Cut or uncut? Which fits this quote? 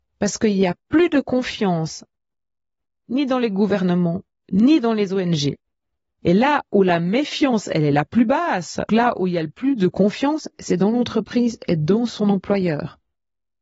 cut